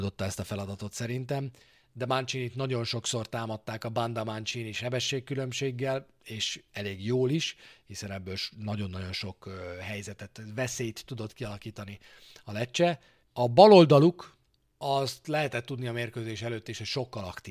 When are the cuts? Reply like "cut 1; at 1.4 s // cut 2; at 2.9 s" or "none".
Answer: cut 1; at 13.2 s